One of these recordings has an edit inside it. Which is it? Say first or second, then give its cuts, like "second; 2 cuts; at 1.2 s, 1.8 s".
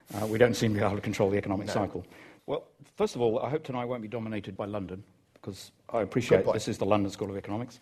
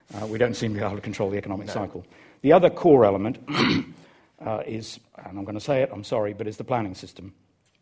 first; 2 cuts; at 2.4 s, 4.6 s